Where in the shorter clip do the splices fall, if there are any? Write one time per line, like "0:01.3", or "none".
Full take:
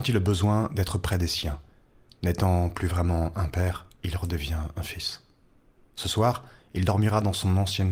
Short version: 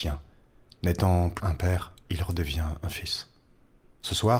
0:01.4